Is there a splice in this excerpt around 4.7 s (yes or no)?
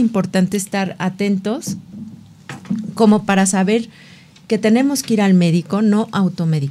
no